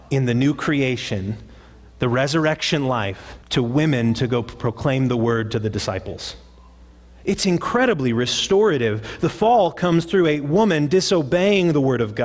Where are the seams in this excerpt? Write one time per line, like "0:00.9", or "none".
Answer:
0:03.4